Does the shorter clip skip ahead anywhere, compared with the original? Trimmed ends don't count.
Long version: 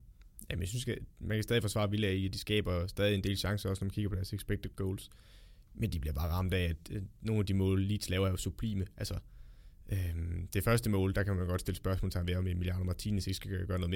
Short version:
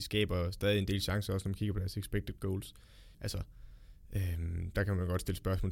yes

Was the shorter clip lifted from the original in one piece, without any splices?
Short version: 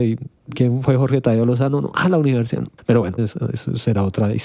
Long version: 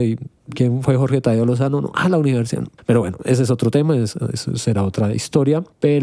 no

